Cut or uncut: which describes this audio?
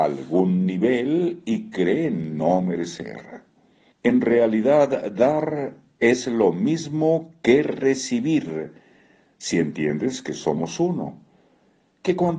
cut